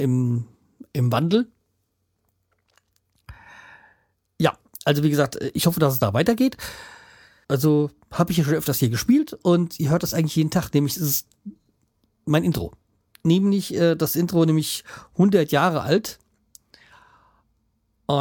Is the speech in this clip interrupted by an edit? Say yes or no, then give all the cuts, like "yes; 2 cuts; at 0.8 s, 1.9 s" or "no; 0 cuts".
yes; 1 cut; at 7.4 s